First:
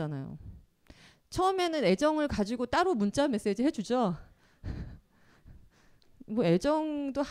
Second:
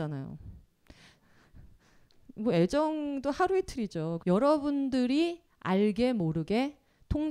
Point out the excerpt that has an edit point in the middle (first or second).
second